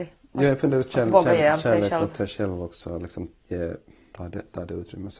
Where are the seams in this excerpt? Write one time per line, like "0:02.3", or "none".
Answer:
0:04.1